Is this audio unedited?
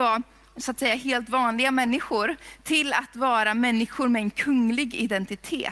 yes; 0 cuts

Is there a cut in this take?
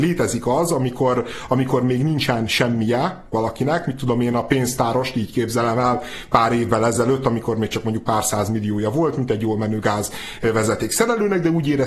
no; 0 cuts

